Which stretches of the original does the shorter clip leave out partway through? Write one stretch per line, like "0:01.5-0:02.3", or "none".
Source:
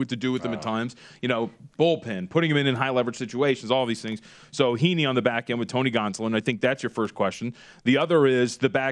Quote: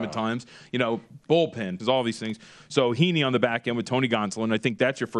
0:02.3-0:03.6

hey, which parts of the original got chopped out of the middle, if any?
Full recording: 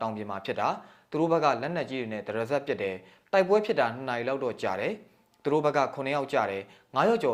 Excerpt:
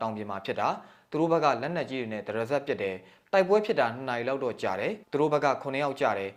0:05.0-0:05.4

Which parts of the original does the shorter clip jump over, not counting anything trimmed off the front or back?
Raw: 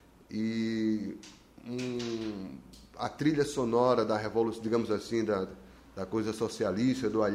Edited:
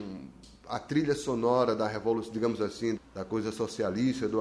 0:05.3-0:05.8

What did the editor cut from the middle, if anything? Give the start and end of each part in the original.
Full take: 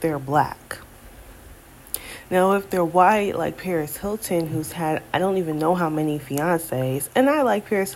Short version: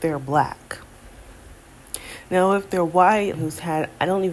0:03.3-0:04.5

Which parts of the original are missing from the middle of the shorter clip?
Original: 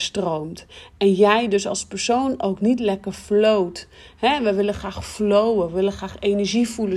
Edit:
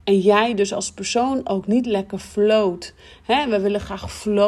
none

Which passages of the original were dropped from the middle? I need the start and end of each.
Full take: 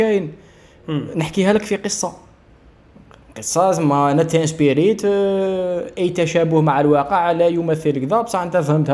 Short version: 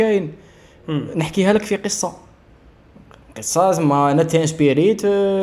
none

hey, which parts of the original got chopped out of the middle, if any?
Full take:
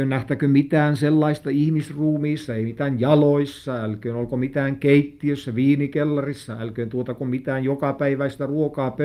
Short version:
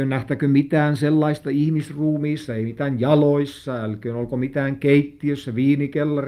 none

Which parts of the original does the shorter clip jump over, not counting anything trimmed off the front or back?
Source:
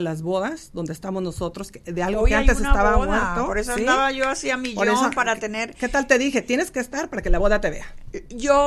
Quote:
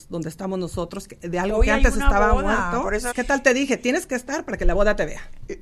0:03.7-0:05.8

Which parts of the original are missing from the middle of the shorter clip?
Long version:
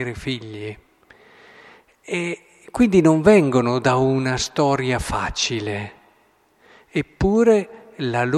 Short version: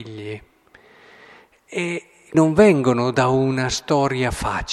0:02.7-0:03.0

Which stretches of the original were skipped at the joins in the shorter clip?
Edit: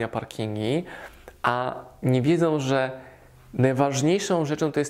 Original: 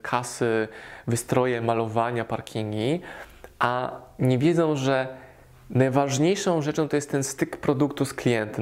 none

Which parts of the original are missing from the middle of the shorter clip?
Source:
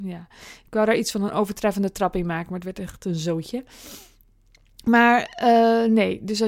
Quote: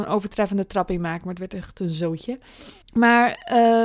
0:04.1-0:04.7

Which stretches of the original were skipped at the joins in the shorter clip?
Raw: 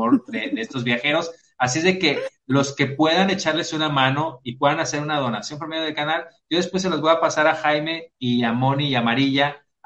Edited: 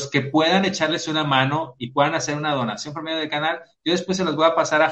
none

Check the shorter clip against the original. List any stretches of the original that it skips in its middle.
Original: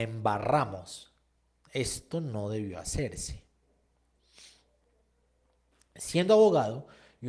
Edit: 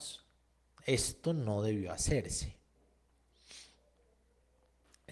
none

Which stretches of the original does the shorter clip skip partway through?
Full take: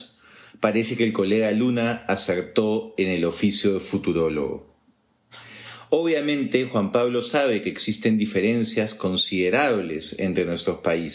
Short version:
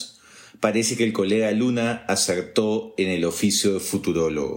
none

